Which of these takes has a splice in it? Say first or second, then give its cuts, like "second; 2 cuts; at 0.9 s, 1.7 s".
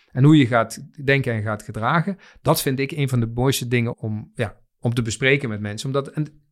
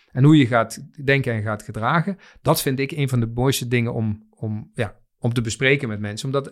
first; 1 cut; at 3.9 s